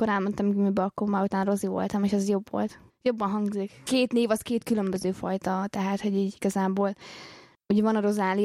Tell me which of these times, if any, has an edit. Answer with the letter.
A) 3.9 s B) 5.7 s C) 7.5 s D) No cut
A